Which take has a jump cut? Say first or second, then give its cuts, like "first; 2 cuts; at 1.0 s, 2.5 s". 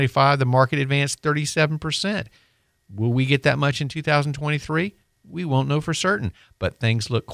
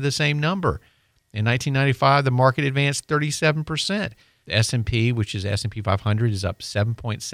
second; 1 cut; at 4.4 s